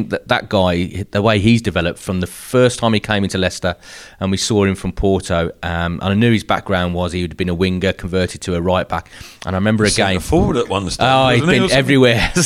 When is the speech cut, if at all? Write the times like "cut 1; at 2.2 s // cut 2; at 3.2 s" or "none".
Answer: none